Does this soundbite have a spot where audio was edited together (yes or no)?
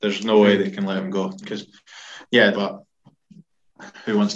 yes